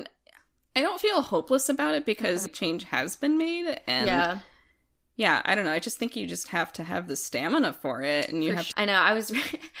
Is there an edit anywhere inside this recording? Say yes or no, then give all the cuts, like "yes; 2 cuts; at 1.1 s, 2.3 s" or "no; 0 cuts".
yes; 1 cut; at 8.7 s